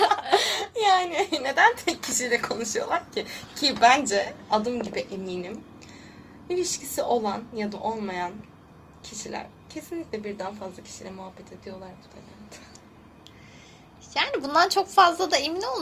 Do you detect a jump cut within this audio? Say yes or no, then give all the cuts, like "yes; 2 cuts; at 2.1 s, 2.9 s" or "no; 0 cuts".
no; 0 cuts